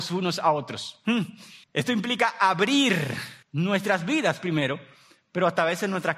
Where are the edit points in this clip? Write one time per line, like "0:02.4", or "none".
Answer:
0:01.6
0:03.4